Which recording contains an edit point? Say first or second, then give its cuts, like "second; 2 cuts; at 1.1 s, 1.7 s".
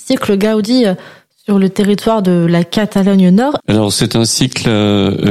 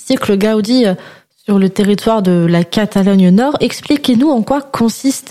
first; 1 cut; at 3.6 s